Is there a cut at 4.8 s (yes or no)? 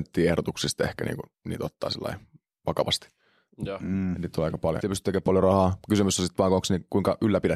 yes